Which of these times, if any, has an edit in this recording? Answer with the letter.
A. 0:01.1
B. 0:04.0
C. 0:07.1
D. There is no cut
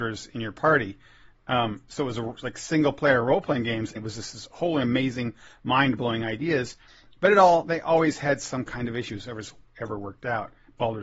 B